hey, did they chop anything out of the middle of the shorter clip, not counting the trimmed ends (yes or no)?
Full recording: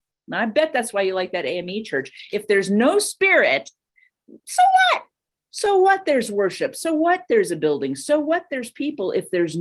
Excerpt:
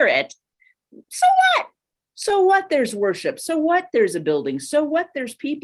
no